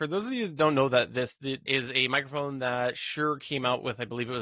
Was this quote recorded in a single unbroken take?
no; 1 cut; at 1.7 s

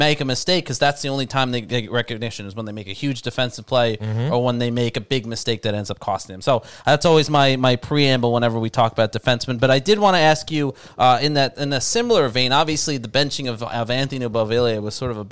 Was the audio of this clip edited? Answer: no; 0 cuts

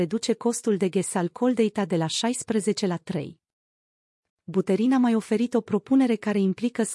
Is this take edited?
yes; 1 cut; at 4.3 s

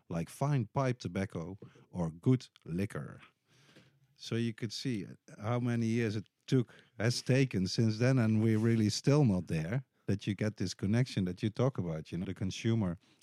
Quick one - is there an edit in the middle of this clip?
yes; 1 cut; at 12.2 s

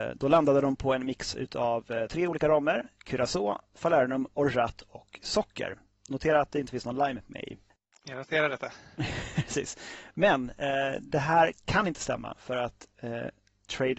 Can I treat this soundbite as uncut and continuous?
yes; 0 cuts

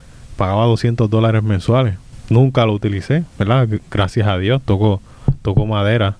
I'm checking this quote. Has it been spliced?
yes; 1 cut; at 3.3 s

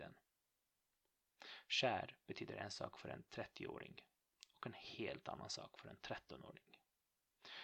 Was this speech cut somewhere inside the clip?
no; 0 cuts

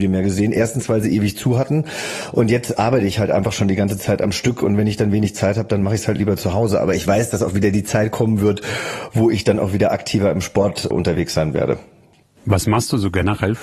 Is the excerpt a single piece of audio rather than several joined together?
yes; 0 cuts

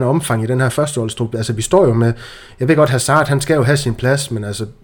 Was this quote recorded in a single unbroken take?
yes; 0 cuts

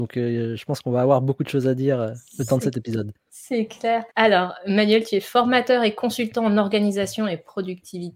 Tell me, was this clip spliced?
yes; 1 cut; at 4.1 s

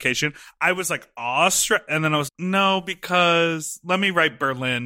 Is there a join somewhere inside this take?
yes; 1 cut; at 2.3 s

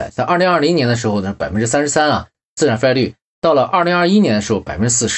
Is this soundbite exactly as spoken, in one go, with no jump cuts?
yes; 0 cuts

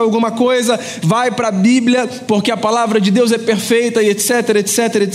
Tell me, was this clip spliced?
yes; 1 cut; at 2.3 s

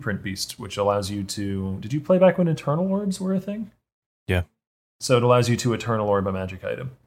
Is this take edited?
no; 0 cuts

